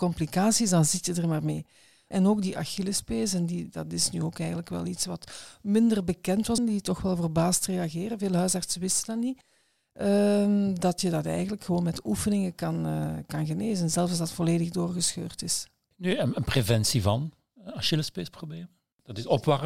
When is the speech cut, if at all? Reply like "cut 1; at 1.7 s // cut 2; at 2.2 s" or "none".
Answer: cut 1; at 6.6 s